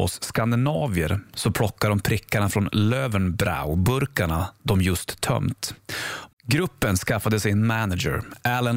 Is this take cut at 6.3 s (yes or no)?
yes